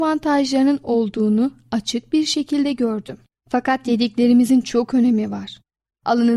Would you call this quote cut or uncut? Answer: cut